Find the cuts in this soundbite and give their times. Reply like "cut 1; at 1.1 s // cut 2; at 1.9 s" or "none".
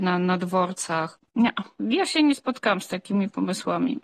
cut 1; at 1.3 s